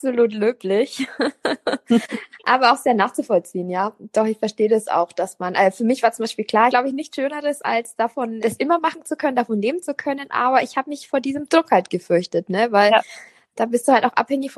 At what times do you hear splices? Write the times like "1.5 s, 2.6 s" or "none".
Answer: 6.7 s, 8.4 s